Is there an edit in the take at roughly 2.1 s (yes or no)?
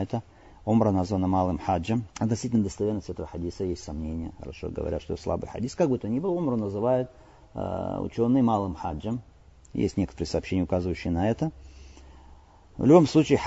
yes